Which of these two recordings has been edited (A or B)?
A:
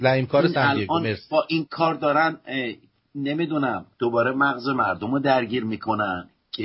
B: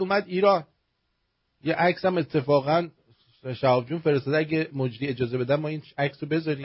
A